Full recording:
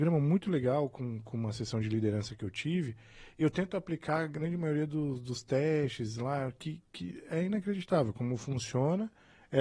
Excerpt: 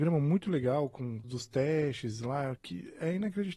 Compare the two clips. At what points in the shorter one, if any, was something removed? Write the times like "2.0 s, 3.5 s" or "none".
1.2 s, 2.6 s